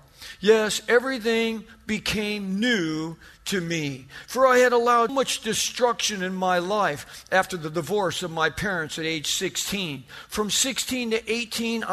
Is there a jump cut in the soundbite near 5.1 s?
yes; 1 cut; at 5.1 s

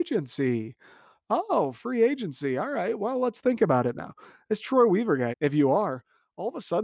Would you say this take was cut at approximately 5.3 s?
yes; 1 cut; at 5.3 s

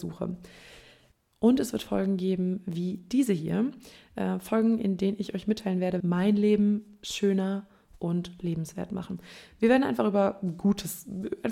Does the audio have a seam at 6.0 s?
yes; 1 cut; at 6.0 s

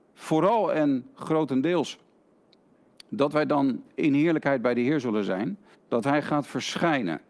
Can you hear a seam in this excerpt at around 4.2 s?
no; 1 cut; at 5.7 s

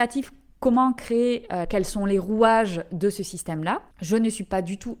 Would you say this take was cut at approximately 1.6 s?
yes; 1 cut; at 1.6 s

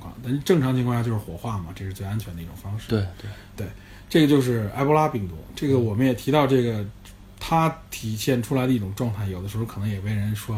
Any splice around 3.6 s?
no; 0 cuts

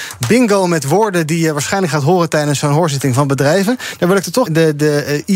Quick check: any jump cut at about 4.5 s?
yes; 1 cut; at 4.5 s

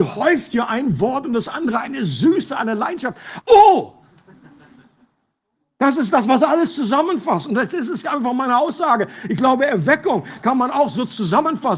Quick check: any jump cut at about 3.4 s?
yes; 1 cut; at 3.4 s

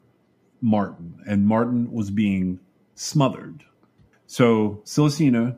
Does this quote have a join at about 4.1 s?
yes; 1 cut; at 4.1 s

